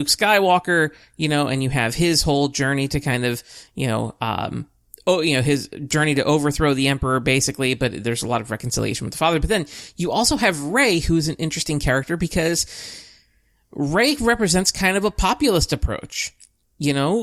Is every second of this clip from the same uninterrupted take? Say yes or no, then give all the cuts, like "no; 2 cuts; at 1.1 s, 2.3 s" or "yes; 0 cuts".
yes; 0 cuts